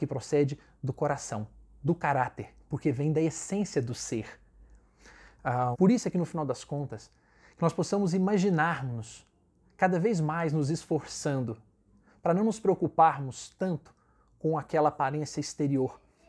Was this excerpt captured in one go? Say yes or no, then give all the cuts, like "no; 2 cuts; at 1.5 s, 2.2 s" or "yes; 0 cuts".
no; 1 cut; at 5.7 s